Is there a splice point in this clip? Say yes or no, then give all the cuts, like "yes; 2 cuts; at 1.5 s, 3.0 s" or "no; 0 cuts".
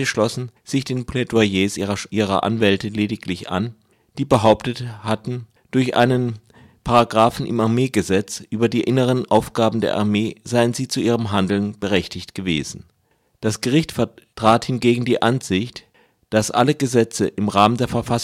no; 0 cuts